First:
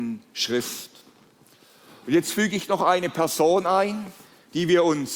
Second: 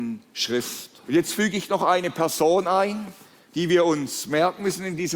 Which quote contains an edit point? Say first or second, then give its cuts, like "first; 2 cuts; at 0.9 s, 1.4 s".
second; 1 cut; at 1.0 s